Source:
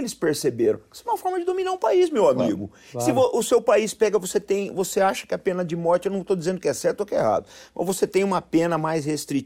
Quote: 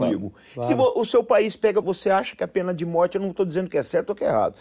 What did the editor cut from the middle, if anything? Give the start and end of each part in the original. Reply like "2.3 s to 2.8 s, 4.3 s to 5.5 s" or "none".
4.2 s to 4.7 s